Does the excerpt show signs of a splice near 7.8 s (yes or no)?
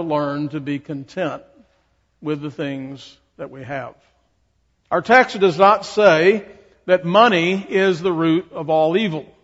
no